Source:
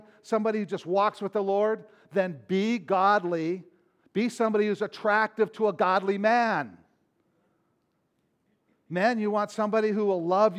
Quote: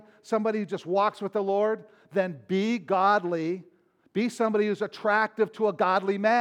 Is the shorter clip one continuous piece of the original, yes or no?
yes